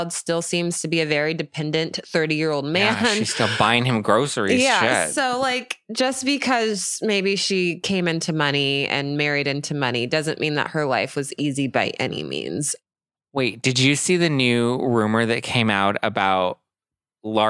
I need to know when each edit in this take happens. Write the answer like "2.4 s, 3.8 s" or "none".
none

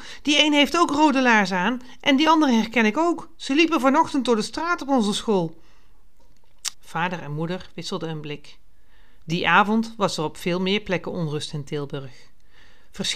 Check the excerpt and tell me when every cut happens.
6.7 s, 9.2 s

